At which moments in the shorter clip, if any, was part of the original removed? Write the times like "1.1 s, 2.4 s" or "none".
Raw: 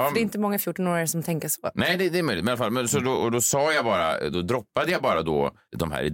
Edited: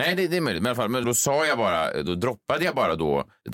1.0 s